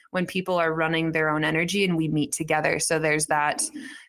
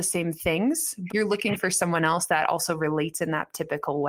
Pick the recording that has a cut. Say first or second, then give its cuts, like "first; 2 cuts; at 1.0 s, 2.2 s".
second; 1 cut; at 1.1 s